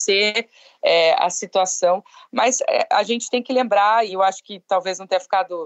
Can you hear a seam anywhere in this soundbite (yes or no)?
yes